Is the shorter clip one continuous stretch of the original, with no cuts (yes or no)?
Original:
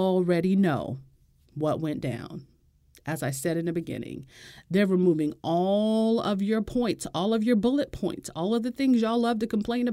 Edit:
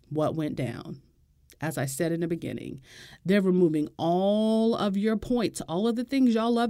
no